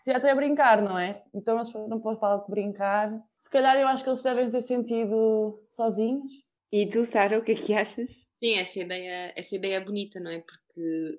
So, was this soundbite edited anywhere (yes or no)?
no